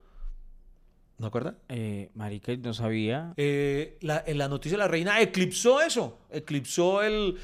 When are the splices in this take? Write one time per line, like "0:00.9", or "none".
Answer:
0:03.3